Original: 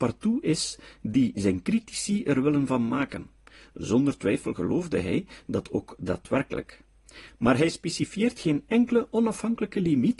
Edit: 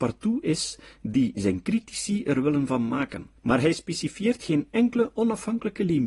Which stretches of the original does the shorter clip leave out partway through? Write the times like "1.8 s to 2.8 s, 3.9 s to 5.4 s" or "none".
3.4 s to 7.3 s